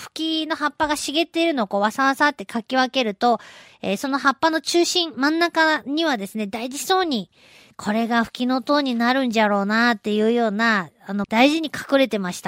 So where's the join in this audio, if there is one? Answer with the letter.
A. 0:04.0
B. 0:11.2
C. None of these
B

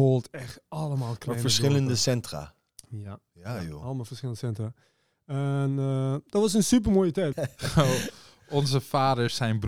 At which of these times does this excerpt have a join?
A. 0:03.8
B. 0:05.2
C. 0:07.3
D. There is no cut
C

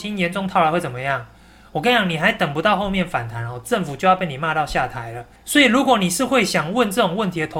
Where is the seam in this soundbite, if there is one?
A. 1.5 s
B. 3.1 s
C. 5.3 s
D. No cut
D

